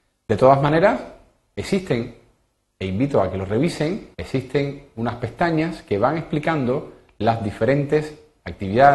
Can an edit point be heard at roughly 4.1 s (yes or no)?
yes